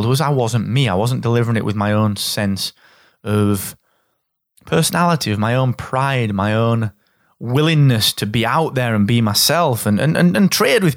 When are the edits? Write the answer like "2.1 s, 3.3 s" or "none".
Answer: none